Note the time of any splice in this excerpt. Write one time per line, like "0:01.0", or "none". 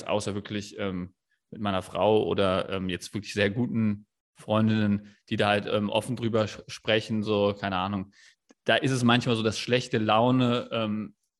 none